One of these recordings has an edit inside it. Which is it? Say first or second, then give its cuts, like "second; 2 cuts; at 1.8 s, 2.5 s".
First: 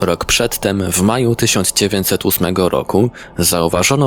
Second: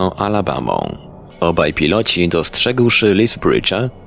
second; 1 cut; at 1.3 s